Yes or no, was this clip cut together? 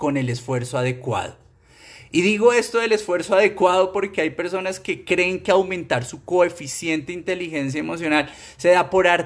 no